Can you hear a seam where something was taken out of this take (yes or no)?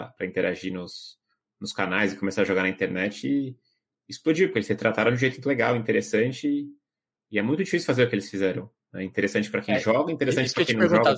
no